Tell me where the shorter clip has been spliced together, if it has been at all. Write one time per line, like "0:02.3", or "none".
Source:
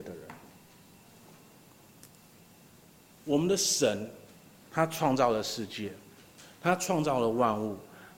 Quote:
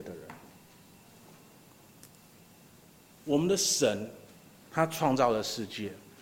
none